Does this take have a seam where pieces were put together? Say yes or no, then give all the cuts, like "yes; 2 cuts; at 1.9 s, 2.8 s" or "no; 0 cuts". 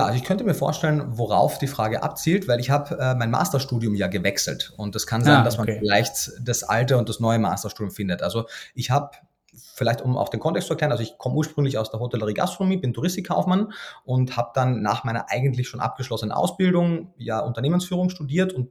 no; 0 cuts